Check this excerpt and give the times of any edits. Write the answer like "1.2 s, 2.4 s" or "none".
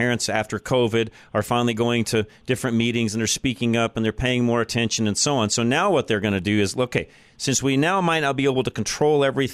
none